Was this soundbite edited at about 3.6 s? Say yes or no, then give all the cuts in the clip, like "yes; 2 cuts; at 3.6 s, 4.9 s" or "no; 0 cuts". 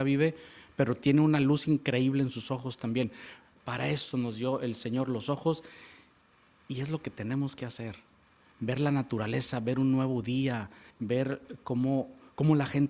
yes; 2 cuts; at 3.6 s, 10.9 s